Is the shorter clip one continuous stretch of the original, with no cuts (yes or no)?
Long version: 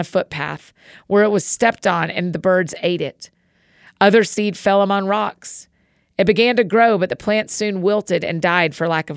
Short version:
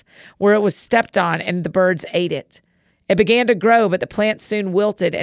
no